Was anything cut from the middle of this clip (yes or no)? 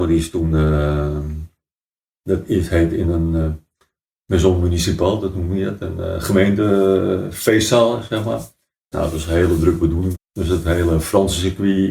yes